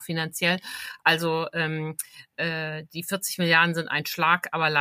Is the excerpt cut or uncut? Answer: uncut